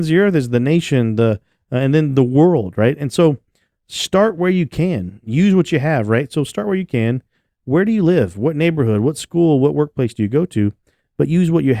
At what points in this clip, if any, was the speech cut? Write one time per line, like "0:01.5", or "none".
none